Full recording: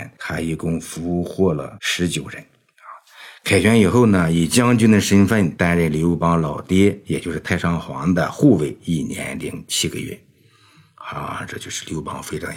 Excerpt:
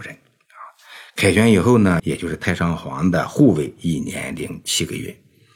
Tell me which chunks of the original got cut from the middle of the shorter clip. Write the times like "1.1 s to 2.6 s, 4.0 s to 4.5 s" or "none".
4.3 s to 7.0 s